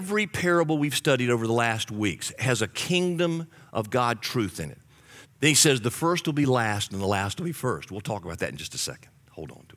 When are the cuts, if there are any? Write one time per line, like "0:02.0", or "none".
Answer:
0:05.2